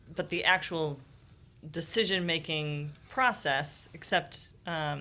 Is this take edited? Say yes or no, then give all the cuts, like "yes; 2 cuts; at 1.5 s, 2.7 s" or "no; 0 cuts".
no; 0 cuts